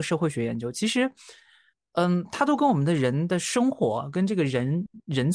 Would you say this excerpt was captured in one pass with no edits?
yes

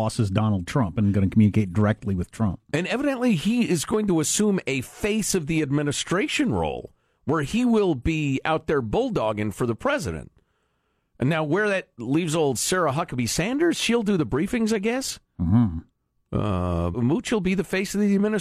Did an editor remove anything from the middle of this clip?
yes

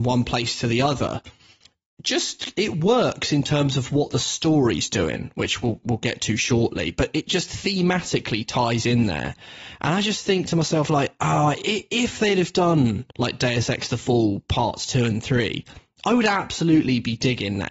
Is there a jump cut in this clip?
yes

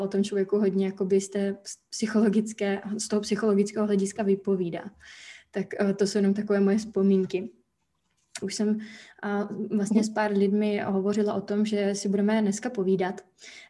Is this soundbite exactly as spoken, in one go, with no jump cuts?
no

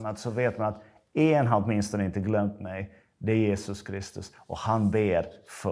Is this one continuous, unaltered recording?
yes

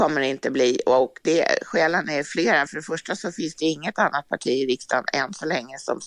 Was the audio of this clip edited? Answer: no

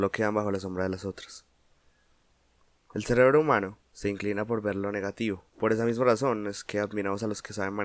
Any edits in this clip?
yes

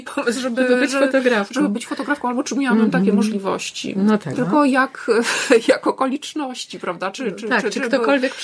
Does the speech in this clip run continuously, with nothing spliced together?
no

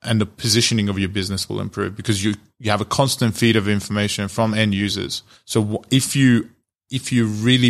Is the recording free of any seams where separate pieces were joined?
no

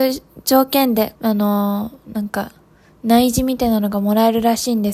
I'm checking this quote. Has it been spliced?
yes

